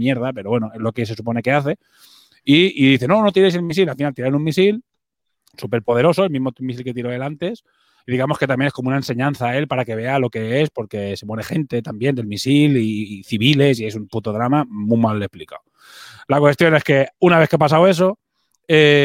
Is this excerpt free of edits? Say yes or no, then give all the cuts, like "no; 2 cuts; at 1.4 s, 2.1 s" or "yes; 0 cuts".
yes; 0 cuts